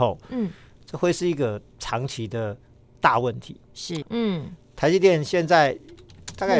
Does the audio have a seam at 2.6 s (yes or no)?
no